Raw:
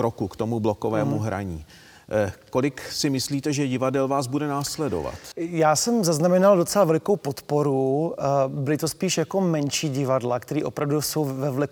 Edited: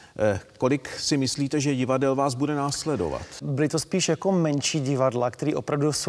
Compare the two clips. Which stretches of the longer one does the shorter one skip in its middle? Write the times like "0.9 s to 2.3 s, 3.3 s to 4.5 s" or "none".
5.3 s to 8.5 s